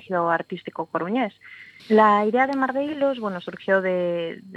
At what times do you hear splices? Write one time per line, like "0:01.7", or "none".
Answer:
0:01.8